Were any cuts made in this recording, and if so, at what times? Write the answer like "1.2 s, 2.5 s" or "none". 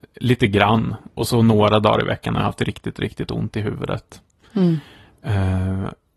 none